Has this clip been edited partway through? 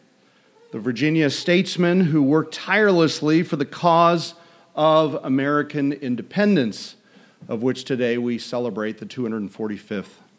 no; 0 cuts

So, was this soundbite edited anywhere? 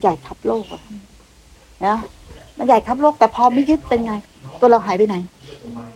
no; 0 cuts

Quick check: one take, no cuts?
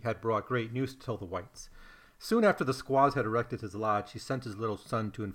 yes; 0 cuts

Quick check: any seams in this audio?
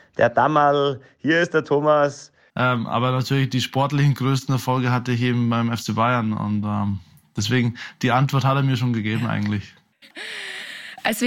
yes; 2 cuts; at 2.5 s, 10.0 s

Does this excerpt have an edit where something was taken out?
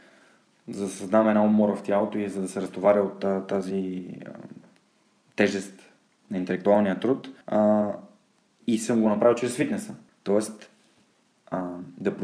yes; 2 cuts; at 7.4 s, 10.1 s

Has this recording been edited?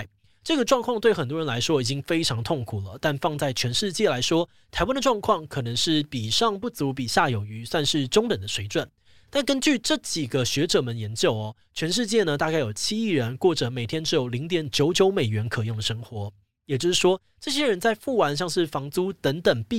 no; 0 cuts

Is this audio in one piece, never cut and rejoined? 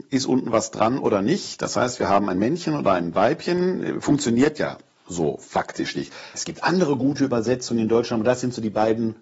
no; 1 cut; at 6.3 s

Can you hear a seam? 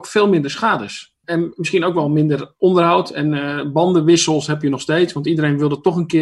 no; 0 cuts

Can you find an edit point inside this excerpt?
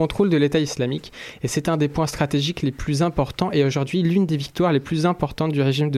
no; 0 cuts

